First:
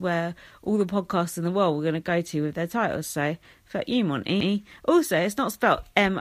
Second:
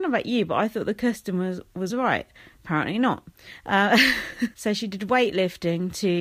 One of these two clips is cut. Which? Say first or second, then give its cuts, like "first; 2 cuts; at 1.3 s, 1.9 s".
second; 2 cuts; at 1.9 s, 4.5 s